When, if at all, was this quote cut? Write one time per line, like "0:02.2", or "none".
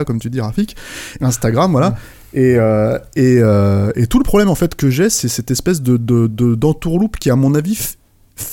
0:01.2